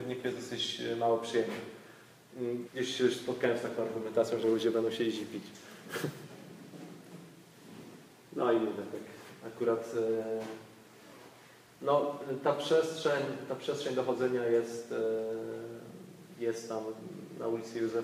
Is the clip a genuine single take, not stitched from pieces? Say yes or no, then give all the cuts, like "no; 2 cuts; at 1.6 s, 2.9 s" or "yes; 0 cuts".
no; 2 cuts; at 2.6 s, 4.4 s